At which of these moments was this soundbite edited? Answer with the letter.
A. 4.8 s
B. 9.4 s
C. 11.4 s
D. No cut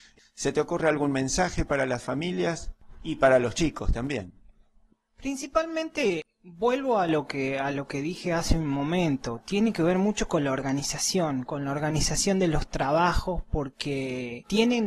C